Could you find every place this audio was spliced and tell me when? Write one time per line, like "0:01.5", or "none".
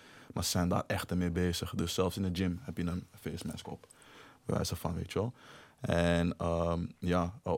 none